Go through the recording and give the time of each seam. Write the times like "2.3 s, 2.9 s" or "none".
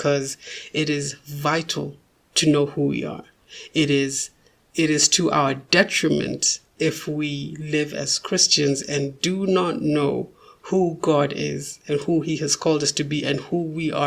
none